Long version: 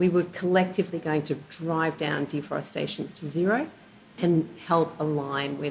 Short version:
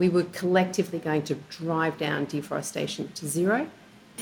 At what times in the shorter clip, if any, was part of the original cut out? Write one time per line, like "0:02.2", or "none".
none